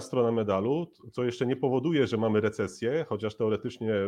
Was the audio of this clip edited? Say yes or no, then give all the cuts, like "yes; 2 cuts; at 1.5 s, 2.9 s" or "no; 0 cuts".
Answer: no; 0 cuts